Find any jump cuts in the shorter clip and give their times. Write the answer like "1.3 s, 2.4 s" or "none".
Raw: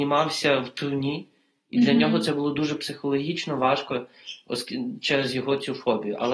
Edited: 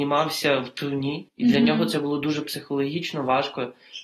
1.3 s